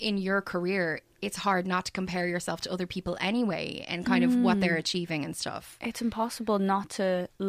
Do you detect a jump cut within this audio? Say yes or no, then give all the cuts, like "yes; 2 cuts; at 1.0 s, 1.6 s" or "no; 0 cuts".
no; 0 cuts